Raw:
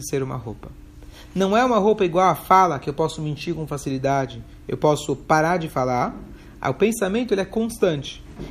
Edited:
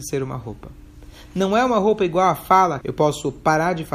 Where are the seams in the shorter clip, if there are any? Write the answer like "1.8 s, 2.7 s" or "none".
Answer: 2.8 s